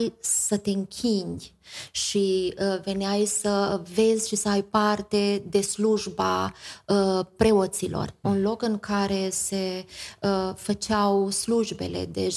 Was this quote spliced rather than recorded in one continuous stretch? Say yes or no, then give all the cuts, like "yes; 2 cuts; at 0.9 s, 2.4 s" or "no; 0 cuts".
yes; 1 cut; at 8.2 s